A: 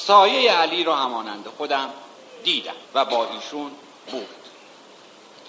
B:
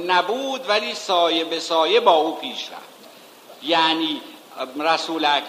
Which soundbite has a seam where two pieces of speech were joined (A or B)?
A